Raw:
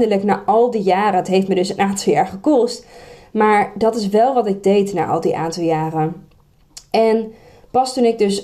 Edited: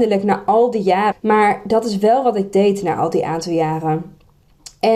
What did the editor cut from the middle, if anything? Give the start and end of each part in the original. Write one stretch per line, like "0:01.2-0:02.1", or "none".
0:01.1-0:03.2